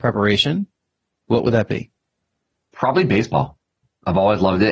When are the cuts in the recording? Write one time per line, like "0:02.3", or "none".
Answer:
0:02.7